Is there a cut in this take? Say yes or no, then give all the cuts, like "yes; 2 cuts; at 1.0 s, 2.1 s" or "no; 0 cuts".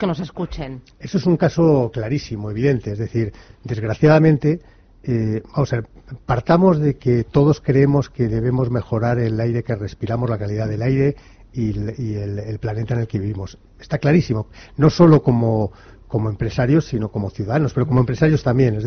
no; 0 cuts